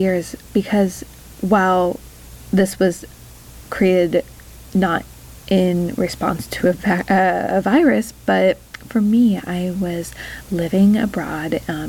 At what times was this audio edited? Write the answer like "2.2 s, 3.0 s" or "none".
none